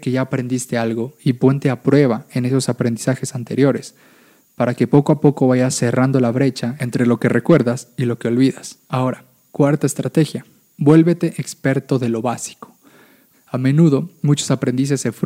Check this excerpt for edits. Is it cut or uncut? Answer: cut